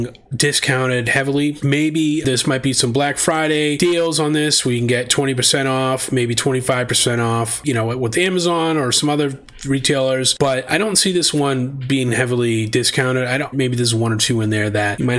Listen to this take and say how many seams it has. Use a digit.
1